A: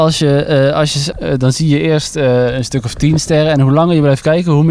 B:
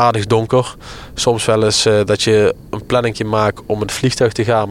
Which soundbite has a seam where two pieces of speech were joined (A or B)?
A